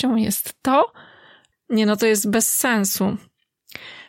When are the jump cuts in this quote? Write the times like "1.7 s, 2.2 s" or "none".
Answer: 1.5 s